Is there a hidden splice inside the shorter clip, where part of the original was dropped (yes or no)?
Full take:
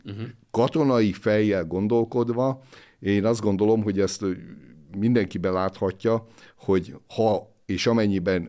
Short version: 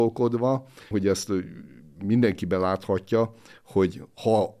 yes